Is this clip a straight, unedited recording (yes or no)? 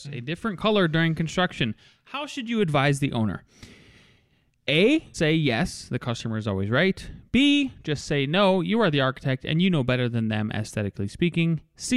no